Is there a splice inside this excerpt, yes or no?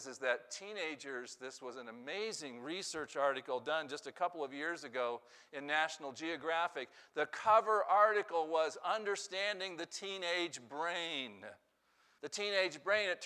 yes